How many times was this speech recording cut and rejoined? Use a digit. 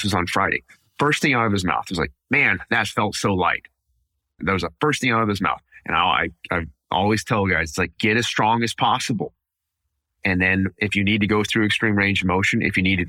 1